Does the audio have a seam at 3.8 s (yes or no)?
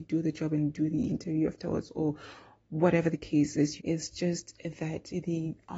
yes